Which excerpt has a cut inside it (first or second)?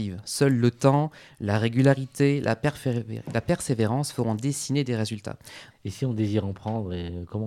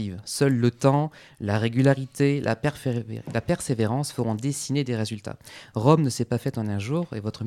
first